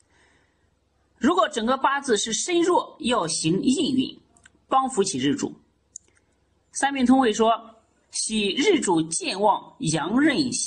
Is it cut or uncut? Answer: cut